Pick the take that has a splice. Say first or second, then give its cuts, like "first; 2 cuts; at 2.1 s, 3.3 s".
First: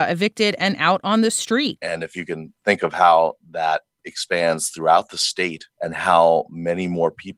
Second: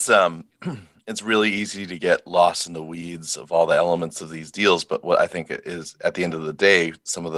first; 2 cuts; at 1.8 s, 5.7 s